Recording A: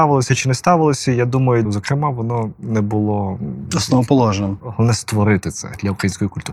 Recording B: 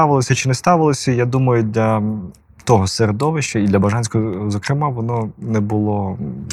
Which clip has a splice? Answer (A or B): A